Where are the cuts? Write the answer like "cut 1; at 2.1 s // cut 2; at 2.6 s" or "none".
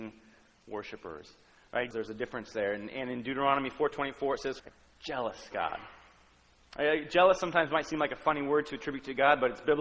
cut 1; at 1.9 s // cut 2; at 4.6 s